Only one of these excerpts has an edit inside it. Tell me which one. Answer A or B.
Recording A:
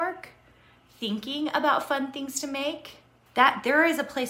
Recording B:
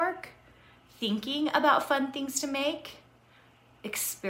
A